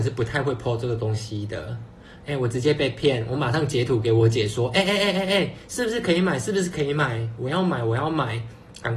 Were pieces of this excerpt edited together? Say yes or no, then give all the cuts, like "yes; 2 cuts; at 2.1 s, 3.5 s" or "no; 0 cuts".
no; 0 cuts